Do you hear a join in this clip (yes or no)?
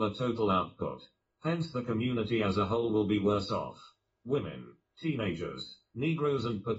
no